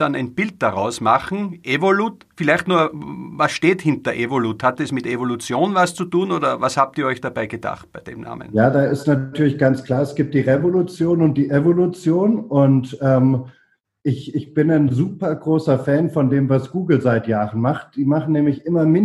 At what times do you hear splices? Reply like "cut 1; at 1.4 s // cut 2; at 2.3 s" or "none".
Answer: none